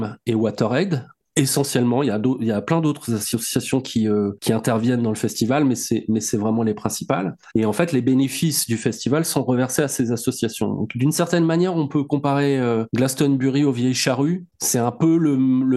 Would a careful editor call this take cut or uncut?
uncut